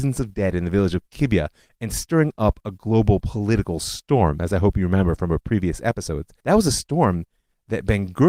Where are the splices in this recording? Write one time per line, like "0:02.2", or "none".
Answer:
0:06.4